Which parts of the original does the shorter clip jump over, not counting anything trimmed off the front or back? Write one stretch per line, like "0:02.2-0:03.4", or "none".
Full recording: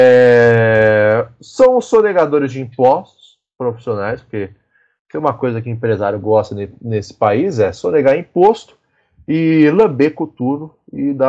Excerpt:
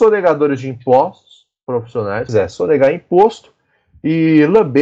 0:04.2-0:07.5